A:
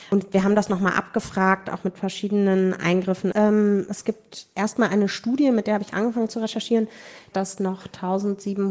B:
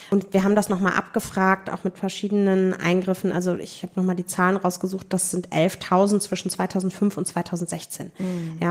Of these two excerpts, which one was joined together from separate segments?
A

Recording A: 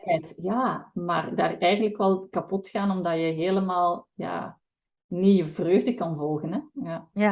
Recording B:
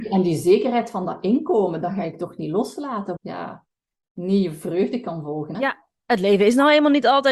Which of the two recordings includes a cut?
B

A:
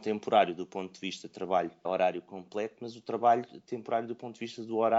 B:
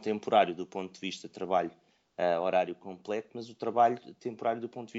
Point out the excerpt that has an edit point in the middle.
A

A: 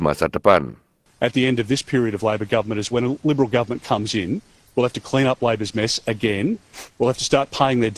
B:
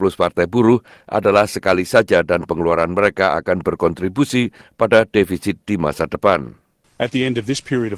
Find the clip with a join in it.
A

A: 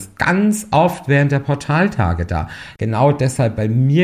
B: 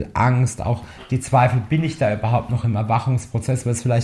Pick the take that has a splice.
A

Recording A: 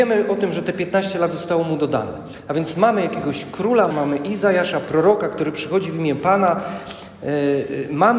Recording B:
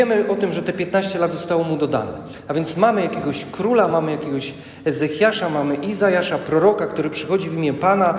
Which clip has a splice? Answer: A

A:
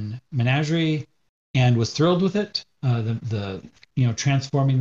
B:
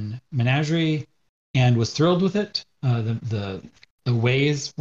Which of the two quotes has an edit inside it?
A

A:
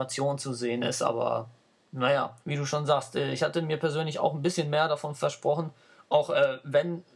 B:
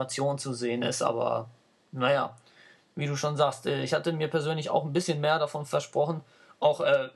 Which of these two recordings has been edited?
A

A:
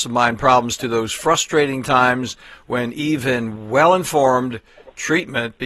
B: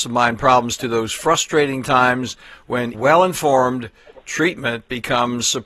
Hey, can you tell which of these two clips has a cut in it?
B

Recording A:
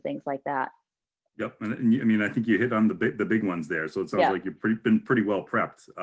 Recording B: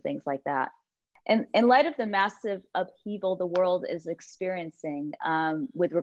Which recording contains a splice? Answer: B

